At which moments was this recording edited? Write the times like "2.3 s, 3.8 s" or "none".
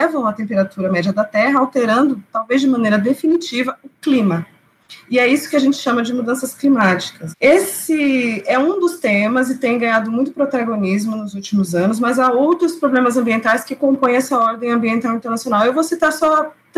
7.3 s